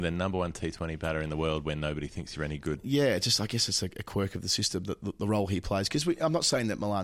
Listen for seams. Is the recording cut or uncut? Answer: uncut